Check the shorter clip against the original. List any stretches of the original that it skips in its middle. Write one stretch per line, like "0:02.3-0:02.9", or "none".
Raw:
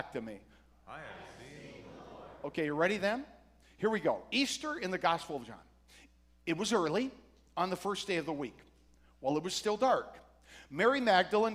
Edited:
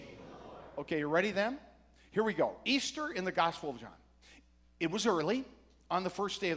none

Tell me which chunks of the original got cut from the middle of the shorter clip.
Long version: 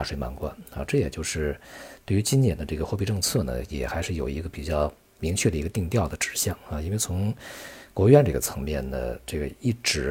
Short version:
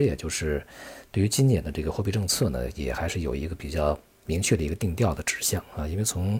none

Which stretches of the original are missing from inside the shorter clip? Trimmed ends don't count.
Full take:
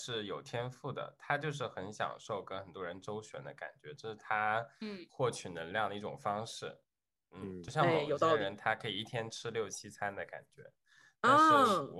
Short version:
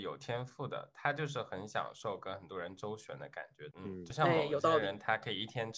0:04.0-0:07.3

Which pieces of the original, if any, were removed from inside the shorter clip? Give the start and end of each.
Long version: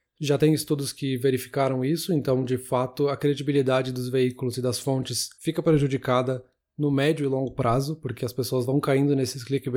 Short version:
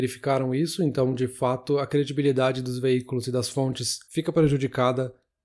none

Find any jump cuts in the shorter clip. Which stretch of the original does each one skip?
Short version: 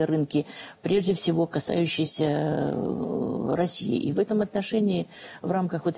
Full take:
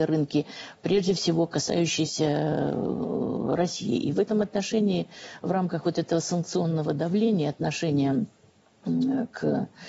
none

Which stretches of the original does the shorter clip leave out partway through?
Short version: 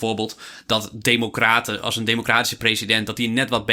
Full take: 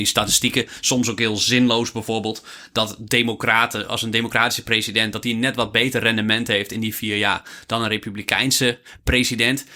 none

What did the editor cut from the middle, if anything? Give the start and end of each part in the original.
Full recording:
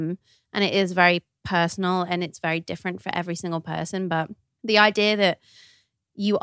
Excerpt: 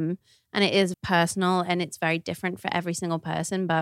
0:00.9-0:01.4

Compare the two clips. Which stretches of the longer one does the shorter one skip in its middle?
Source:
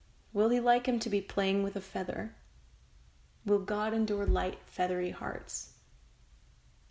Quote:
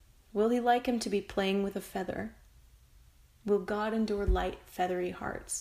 none

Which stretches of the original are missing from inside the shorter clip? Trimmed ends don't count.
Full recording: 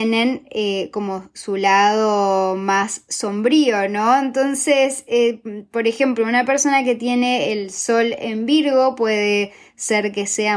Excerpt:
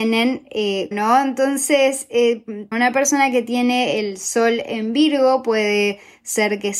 0:00.9-0:03.9
0:05.7-0:06.2

